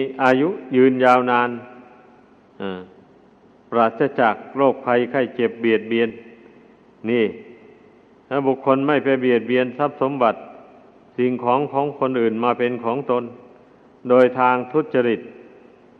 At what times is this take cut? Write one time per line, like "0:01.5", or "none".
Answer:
none